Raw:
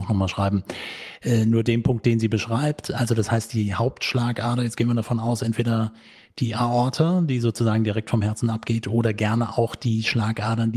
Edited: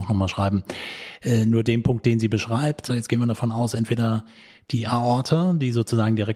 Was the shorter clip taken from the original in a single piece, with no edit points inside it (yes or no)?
no